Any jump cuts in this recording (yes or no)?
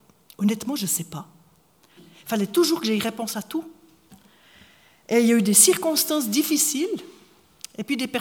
yes